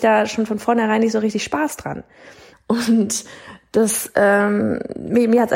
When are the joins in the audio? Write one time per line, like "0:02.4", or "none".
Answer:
0:02.5